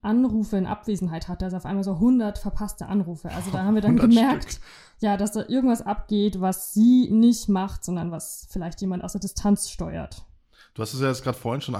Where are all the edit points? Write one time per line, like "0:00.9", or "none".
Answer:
none